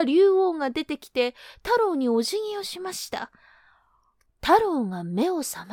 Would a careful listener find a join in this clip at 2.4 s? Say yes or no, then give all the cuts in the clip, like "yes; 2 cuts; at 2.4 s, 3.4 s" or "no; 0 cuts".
no; 1 cut; at 4.3 s